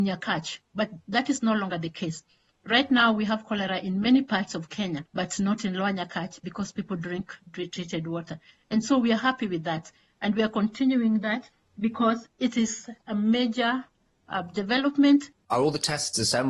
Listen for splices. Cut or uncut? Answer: cut